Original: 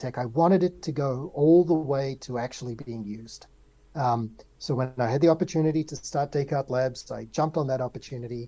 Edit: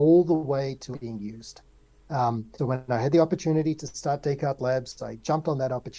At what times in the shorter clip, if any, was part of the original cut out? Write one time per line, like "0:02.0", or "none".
0:00.9
0:02.6

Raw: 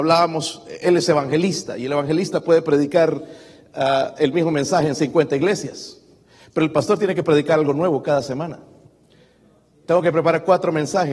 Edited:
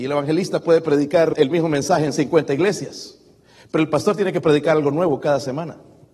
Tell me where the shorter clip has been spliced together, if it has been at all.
0:01.3

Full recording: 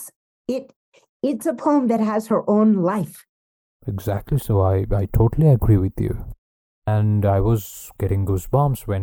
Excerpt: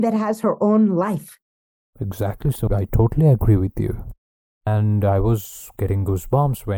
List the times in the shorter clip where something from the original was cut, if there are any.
0:02.7

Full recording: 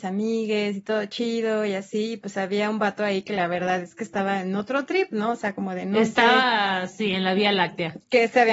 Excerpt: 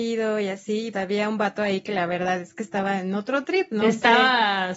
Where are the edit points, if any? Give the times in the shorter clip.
0:00.9
0:03.8

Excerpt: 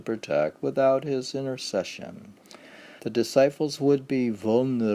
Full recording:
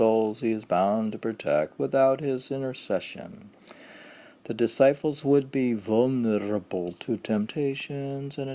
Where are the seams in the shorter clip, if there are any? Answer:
0:03.0

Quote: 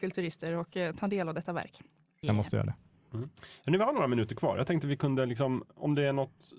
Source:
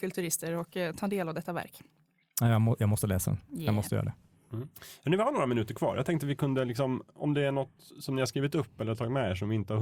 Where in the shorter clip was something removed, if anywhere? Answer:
0:02.2

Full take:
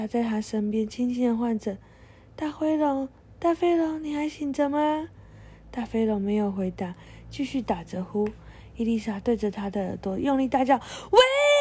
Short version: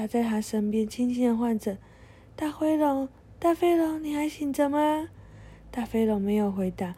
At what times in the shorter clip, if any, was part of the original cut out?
none

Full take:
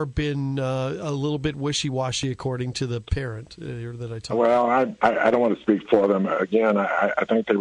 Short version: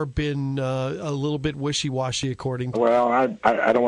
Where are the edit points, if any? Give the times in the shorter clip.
0:02.7

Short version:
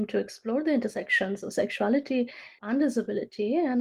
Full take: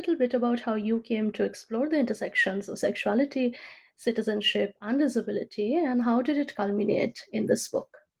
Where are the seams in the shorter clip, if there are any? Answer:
0:02.6

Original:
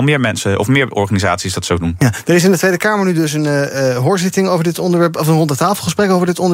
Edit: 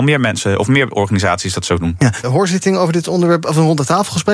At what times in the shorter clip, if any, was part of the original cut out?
0:02.2

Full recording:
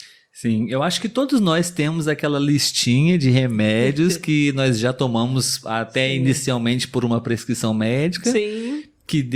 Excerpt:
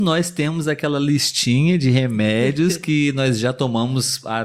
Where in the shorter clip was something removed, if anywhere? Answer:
none

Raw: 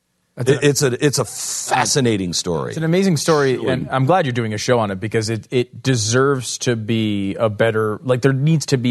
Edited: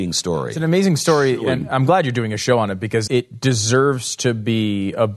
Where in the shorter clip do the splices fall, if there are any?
0:03.1

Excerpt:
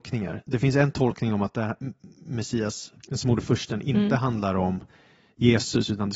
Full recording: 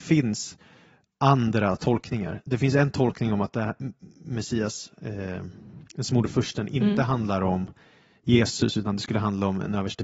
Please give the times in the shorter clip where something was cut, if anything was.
0:03.0

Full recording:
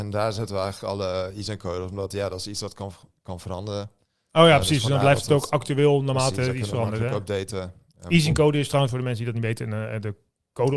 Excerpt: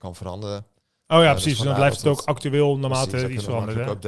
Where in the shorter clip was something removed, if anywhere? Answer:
none

